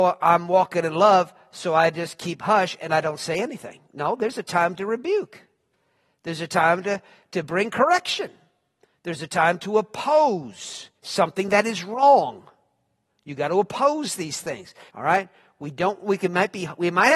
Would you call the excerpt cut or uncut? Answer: cut